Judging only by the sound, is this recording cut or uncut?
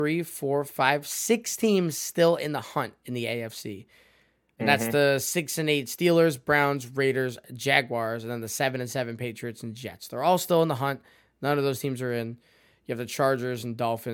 uncut